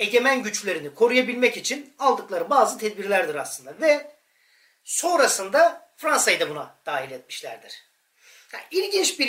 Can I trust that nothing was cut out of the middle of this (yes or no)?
yes